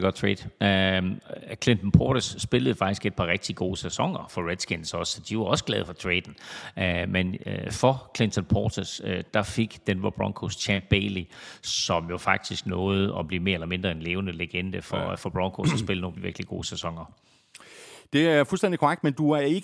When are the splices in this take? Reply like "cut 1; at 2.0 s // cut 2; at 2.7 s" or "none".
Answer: cut 1; at 16.2 s